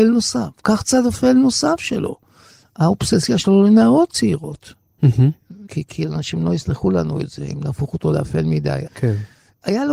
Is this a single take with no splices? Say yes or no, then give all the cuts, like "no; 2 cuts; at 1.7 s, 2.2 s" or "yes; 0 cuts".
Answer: no; 2 cuts; at 5.7 s, 8.9 s